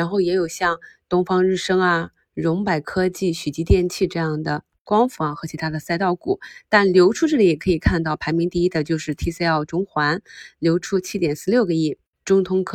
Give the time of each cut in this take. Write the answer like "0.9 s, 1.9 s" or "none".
none